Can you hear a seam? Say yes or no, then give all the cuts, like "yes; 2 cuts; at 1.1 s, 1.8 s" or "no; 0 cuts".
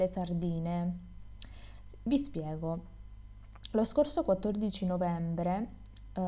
no; 0 cuts